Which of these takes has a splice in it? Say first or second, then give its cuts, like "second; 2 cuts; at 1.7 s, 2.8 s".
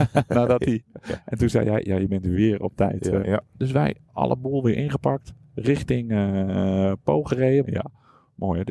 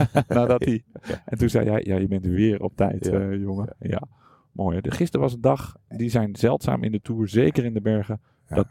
first; 2 cuts; at 3.2 s, 7.6 s